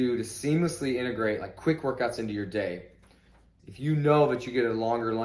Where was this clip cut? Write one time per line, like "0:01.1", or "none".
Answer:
0:03.6